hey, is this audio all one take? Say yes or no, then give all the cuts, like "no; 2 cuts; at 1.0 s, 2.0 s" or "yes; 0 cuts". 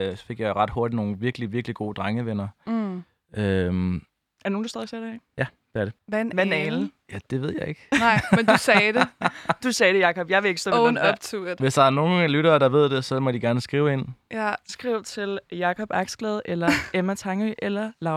no; 1 cut; at 6.0 s